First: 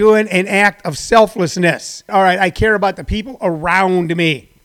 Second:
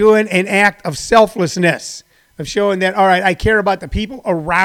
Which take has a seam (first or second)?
first